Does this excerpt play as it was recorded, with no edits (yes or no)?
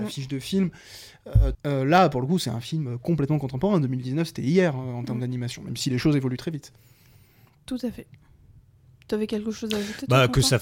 no